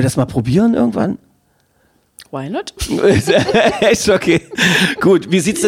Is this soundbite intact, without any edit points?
yes; 0 cuts

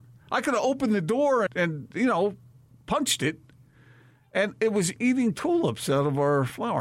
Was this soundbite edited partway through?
yes; 2 cuts; at 1.5 s, 5.0 s

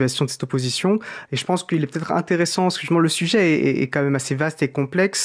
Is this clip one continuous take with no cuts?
no; 1 cut; at 1.3 s

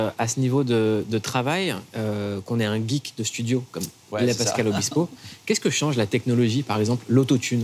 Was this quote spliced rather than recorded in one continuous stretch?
no; 0 cuts

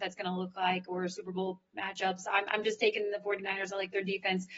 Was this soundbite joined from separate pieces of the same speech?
no; 0 cuts

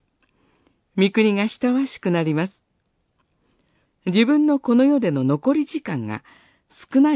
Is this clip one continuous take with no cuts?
no; 1 cut; at 3.9 s

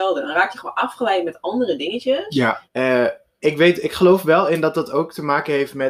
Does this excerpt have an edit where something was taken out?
yes; 1 cut; at 2.7 s

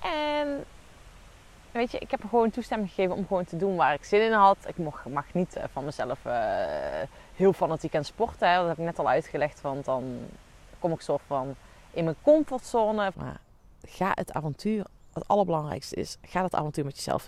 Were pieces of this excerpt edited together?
yes; 1 cut; at 13.1 s

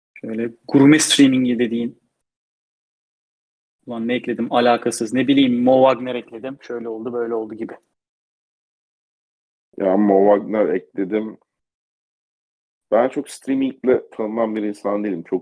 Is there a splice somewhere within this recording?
no; 0 cuts

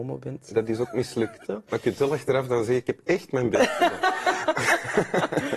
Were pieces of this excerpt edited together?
yes; 1 cut; at 1.5 s

